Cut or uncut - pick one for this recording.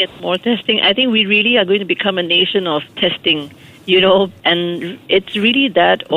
cut